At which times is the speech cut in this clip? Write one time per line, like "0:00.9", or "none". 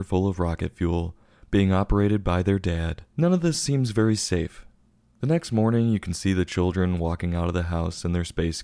0:03.1
0:05.0